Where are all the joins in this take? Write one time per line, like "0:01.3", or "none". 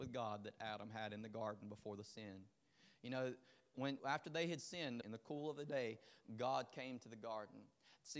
0:04.0
0:05.0

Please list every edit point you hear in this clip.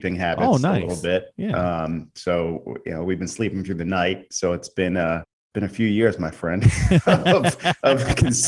none

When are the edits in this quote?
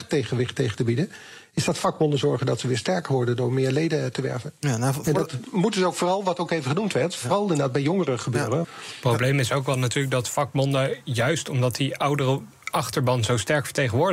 0:05.4
0:08.6

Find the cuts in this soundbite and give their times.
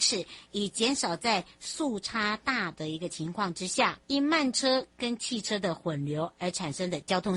0:04.0

